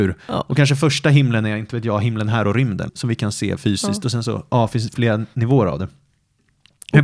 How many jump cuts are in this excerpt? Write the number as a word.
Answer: one